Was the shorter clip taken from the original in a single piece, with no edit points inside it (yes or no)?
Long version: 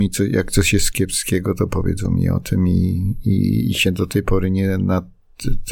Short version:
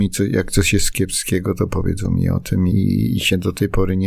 no